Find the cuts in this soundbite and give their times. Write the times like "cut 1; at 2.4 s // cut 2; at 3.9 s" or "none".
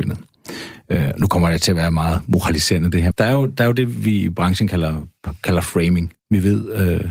cut 1; at 3.1 s // cut 2; at 6.1 s